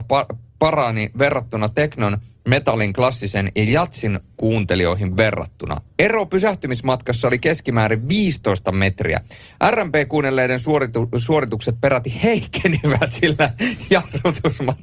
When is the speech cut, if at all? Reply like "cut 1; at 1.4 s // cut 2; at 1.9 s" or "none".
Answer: none